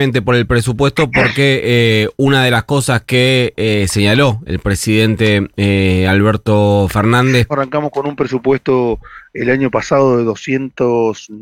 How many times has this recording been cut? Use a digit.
1